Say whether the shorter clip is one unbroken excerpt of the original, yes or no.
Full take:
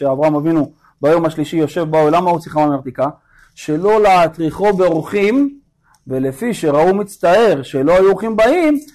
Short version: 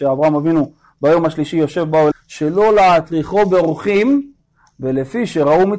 no